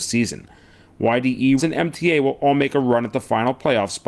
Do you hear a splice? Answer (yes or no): yes